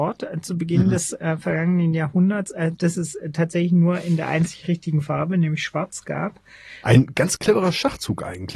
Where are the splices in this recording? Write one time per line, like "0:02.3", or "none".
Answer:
0:06.8

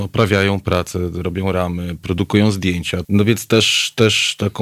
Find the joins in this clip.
0:03.0

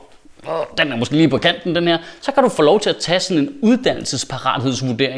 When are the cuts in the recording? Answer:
none

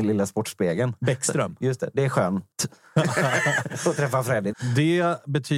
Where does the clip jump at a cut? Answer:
0:02.5
0:04.5

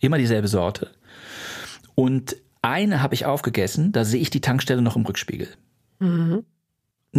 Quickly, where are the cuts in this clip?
none

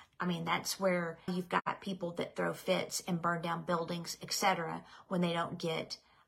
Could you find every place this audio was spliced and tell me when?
0:01.3

